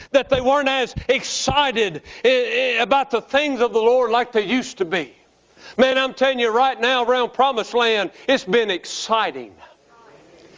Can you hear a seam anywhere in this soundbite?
no; 0 cuts

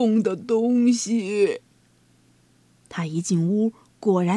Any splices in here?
yes; 1 cut; at 2.7 s

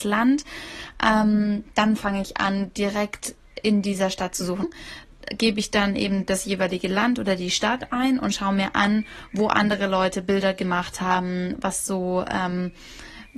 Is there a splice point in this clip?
yes; 1 cut; at 4.6 s

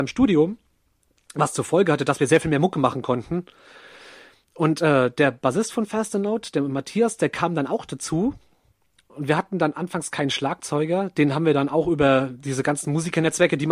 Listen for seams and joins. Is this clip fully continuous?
yes; 0 cuts

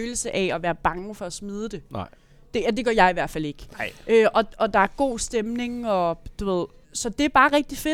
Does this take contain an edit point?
yes; 1 cut; at 6.8 s

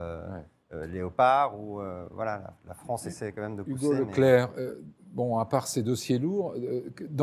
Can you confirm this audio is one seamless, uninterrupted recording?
yes; 0 cuts

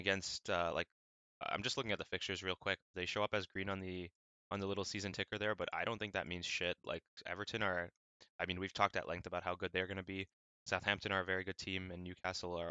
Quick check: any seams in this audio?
yes; 1 cut; at 2.9 s

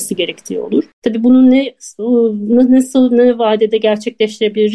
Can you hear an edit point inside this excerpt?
yes; 1 cut; at 0.9 s

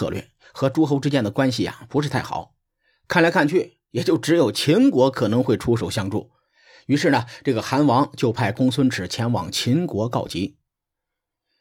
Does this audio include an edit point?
no; 0 cuts

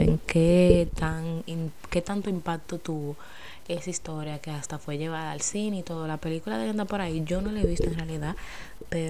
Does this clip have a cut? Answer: no; 0 cuts

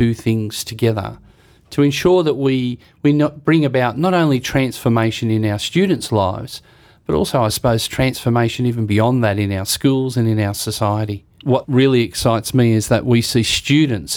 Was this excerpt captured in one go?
yes; 0 cuts

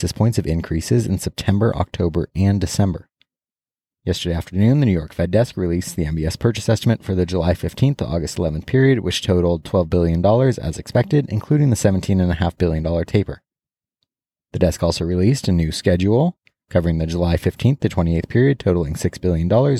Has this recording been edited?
yes; 1 cut; at 3.9 s

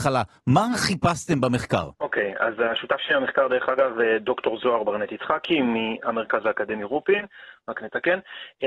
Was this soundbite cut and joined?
yes; 1 cut; at 1.9 s

